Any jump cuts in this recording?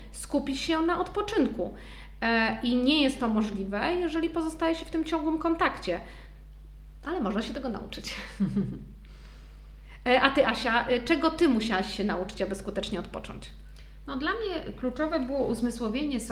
no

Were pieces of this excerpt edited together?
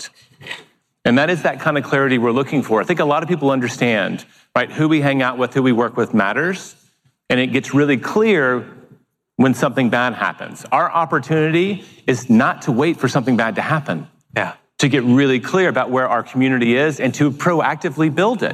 no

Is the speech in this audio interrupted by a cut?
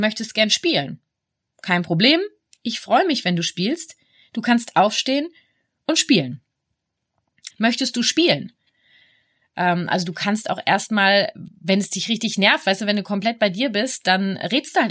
yes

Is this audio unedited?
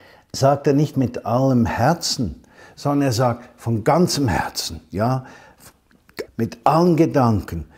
no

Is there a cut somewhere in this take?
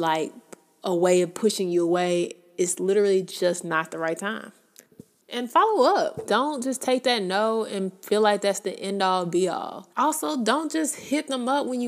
yes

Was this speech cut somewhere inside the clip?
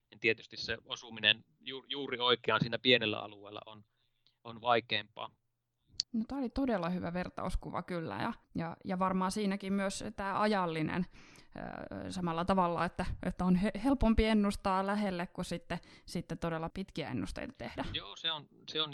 yes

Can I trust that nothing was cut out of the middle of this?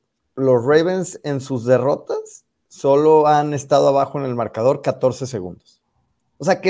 yes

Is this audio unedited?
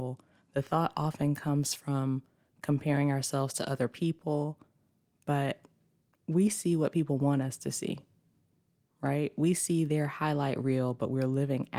yes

